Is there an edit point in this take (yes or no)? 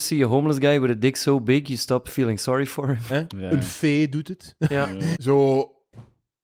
yes